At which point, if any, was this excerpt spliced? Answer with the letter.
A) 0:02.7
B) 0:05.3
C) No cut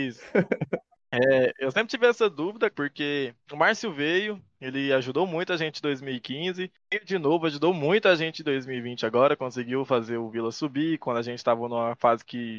A